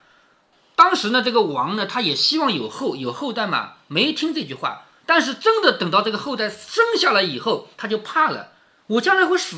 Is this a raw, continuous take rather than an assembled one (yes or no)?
yes